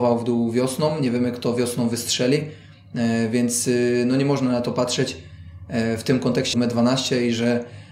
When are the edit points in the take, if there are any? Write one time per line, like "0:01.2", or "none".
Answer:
0:06.5